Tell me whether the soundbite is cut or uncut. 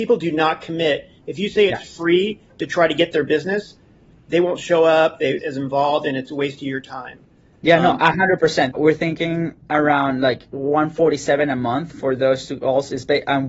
cut